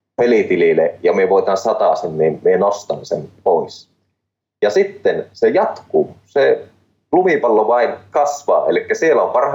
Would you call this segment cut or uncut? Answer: uncut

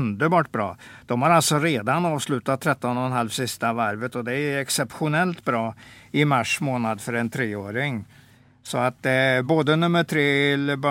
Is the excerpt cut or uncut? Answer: uncut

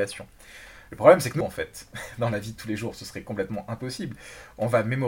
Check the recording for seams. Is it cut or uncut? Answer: cut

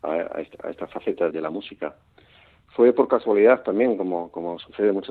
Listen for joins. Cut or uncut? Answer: cut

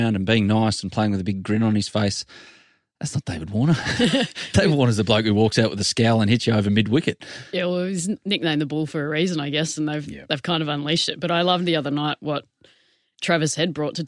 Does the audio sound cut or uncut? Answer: uncut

